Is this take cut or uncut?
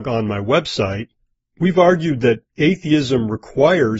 uncut